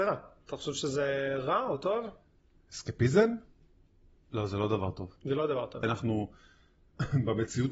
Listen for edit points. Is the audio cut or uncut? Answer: cut